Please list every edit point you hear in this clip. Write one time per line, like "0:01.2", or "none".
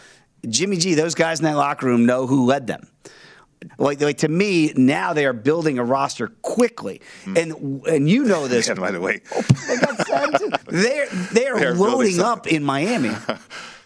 0:03.7
0:08.8
0:10.6